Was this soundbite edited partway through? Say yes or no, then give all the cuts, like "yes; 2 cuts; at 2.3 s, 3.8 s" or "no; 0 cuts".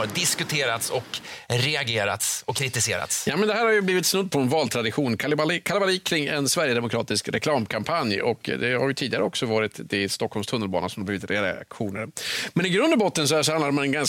no; 0 cuts